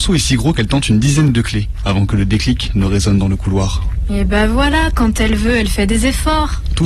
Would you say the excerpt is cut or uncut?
uncut